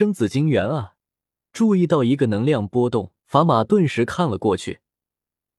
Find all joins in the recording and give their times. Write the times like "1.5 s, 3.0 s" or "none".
1.4 s, 3.2 s